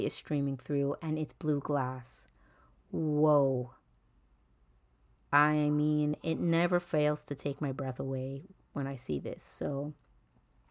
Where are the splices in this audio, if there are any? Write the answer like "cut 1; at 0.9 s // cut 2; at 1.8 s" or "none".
none